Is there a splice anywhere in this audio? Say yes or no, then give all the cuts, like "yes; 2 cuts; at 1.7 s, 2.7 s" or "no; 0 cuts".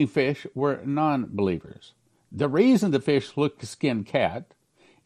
yes; 2 cuts; at 2.3 s, 3.6 s